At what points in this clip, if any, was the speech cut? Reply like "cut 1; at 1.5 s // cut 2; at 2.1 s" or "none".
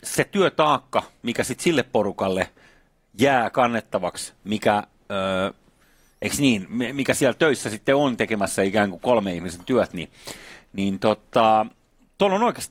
none